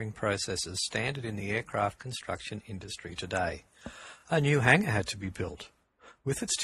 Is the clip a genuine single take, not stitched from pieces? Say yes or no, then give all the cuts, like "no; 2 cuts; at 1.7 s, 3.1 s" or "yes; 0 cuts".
yes; 0 cuts